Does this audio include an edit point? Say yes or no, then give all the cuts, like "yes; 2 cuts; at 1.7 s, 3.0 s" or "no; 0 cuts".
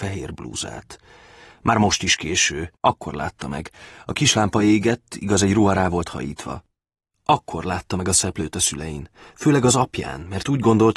yes; 1 cut; at 2.8 s